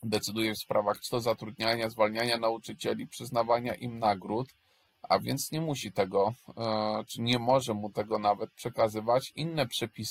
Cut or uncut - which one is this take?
uncut